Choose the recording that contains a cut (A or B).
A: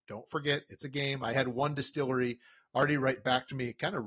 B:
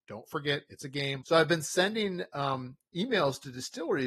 B